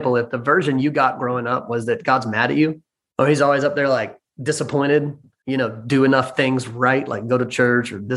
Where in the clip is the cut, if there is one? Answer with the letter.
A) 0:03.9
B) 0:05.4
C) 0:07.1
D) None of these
B